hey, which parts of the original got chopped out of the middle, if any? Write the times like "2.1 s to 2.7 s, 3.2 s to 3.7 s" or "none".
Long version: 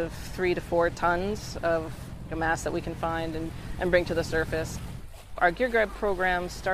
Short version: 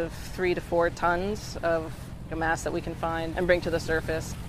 3.3 s to 3.8 s